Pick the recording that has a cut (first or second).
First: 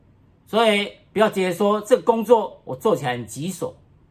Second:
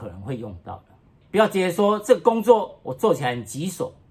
second